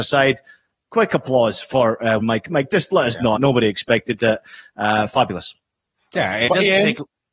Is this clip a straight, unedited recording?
no; 2 cuts; at 2.2 s, 3.4 s

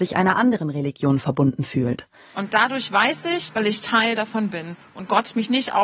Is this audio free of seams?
no; 2 cuts; at 2.3 s, 3.5 s

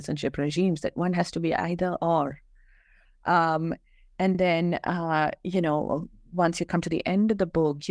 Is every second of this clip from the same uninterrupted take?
yes; 0 cuts

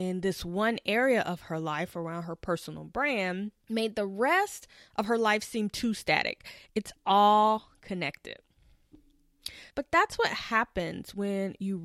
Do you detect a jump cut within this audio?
yes; 3 cuts; at 3.6 s, 6.7 s, 9.7 s

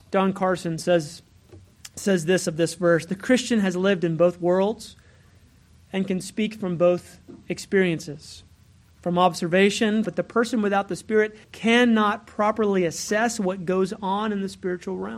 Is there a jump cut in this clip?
yes; 2 cuts; at 10.0 s, 11.4 s

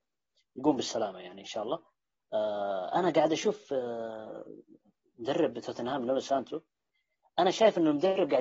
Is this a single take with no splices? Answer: yes; 0 cuts

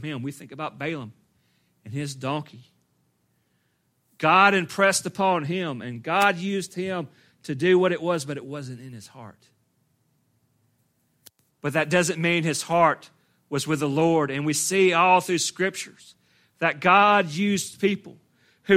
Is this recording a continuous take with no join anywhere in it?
no; 1 cut; at 11.5 s

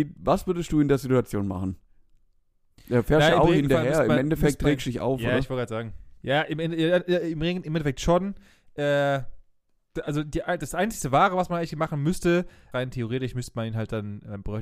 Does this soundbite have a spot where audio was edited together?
yes; 2 cuts; at 6.2 s, 12.7 s

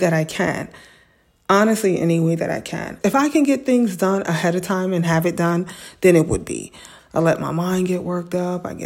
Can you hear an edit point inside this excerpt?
yes; 2 cuts; at 3.0 s, 7.0 s

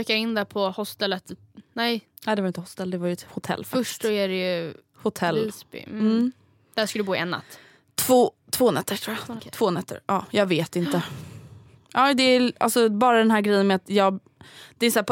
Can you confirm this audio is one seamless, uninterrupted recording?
no; 1 cut; at 9.4 s

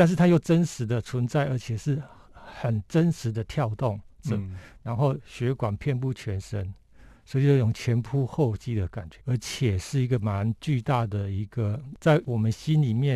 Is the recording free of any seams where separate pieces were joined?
no; 1 cut; at 9.2 s

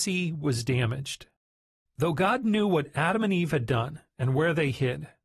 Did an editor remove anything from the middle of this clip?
no; 0 cuts

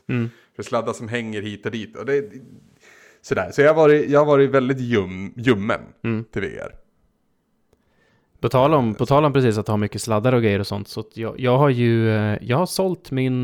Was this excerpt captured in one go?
yes; 0 cuts

